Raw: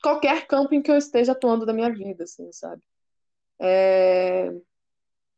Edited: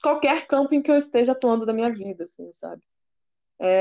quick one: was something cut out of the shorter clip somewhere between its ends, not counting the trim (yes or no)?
no